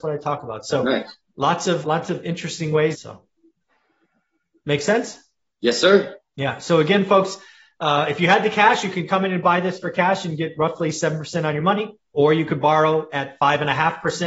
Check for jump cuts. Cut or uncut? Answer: cut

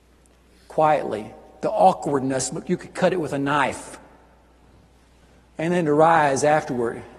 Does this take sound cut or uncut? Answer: uncut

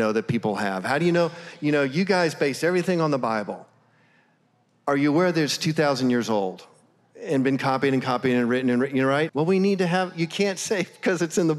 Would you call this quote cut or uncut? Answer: cut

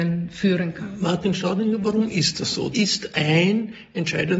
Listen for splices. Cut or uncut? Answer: cut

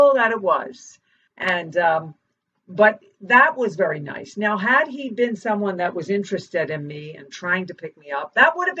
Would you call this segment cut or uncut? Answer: cut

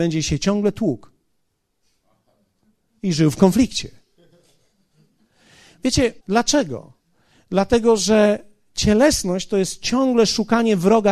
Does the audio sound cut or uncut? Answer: cut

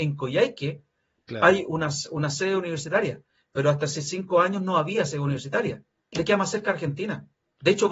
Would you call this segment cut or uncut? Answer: cut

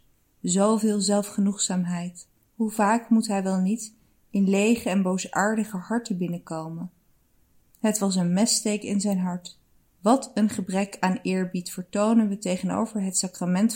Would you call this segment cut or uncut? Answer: cut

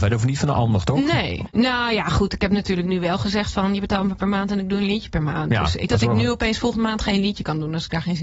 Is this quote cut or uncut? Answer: cut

